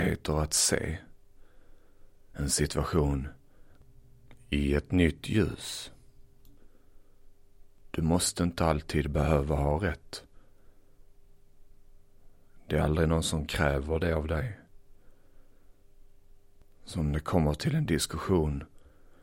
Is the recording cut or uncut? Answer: uncut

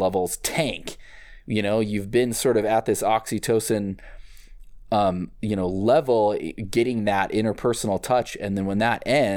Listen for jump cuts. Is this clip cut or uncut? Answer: uncut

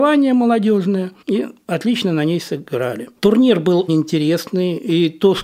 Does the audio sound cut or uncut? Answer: cut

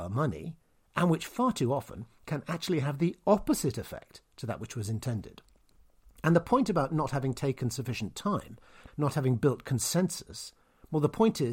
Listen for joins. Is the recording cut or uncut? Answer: cut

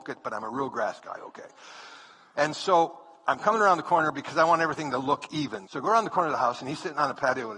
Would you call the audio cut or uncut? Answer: cut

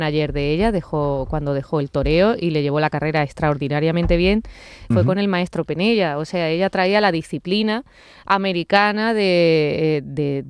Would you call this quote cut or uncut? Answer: cut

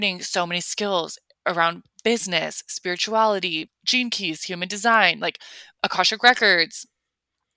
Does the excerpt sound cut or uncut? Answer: cut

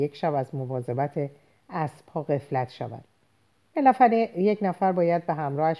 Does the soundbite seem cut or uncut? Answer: uncut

